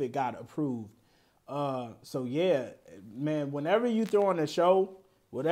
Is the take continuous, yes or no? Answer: yes